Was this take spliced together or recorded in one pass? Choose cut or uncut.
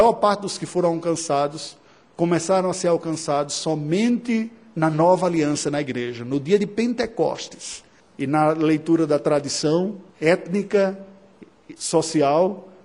cut